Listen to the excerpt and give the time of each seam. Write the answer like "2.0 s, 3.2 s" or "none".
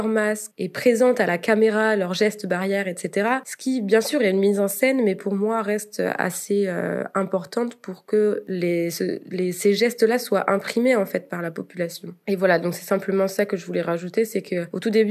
none